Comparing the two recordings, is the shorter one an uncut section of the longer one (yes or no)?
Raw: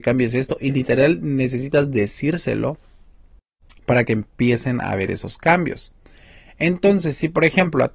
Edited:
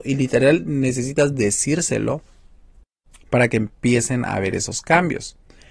yes